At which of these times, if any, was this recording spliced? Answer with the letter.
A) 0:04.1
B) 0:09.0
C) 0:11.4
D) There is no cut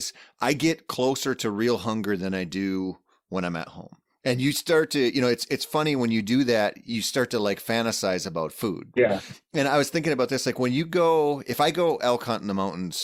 B